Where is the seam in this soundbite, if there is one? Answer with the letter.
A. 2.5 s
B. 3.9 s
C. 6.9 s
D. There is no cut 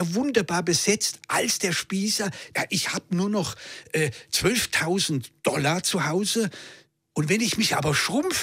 A